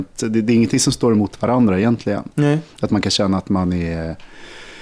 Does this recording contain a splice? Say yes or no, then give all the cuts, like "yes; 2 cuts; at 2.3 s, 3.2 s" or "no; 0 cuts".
no; 0 cuts